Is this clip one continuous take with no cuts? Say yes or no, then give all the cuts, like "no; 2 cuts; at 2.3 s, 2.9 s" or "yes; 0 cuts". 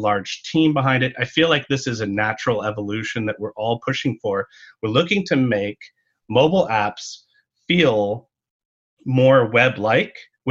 yes; 0 cuts